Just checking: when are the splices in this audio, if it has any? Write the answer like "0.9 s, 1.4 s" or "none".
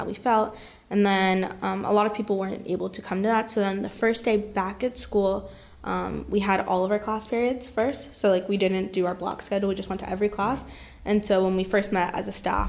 none